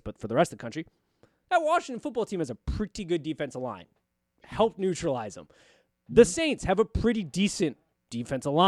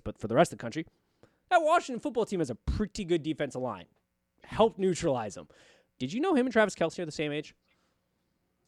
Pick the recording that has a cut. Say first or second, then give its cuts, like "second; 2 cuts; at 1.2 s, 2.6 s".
second; 1 cut; at 6.0 s